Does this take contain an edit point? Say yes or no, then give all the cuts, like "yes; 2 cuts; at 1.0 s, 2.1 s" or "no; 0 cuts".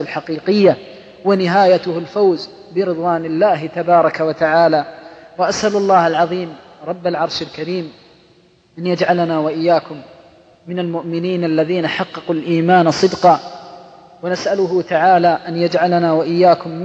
no; 0 cuts